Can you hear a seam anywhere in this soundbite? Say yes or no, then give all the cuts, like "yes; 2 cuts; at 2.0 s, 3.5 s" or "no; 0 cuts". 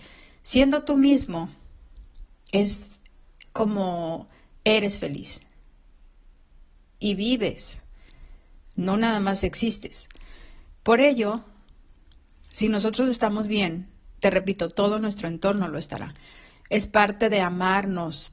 yes; 1 cut; at 10.7 s